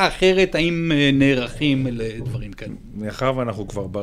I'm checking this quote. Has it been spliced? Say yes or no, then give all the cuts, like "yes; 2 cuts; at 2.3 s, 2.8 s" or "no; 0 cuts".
no; 0 cuts